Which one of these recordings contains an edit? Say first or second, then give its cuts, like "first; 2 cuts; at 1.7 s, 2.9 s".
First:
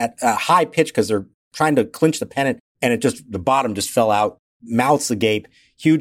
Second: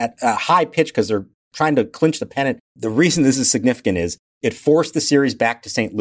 second; 1 cut; at 2.7 s